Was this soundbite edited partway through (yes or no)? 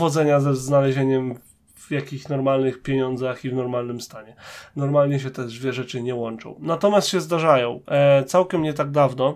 no